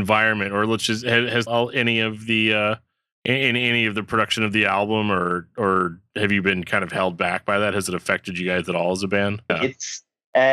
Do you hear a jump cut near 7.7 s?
no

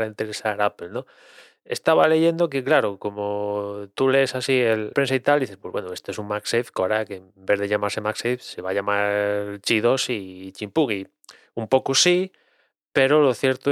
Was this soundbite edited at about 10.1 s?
no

